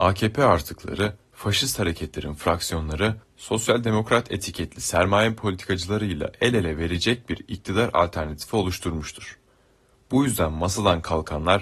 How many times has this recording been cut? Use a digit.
0